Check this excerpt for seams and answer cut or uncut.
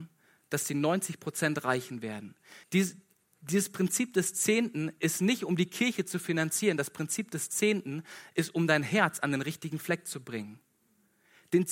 cut